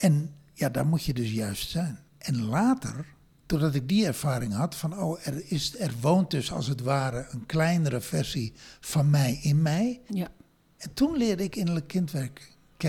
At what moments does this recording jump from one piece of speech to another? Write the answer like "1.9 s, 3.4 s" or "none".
2.1 s, 10.1 s